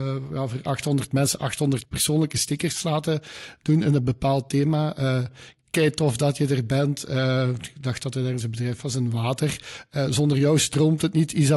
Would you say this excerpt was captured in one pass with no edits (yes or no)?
yes